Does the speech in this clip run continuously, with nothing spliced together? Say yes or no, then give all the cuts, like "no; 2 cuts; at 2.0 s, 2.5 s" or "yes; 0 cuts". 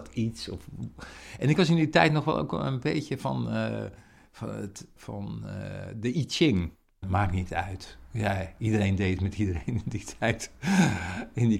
no; 2 cuts; at 5.0 s, 7.0 s